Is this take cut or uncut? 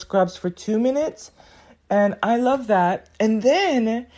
uncut